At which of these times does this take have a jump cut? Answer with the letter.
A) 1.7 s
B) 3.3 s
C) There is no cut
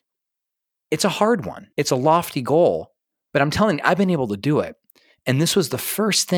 A